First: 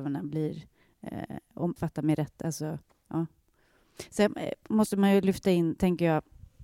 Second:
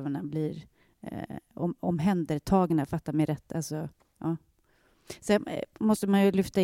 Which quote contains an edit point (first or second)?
first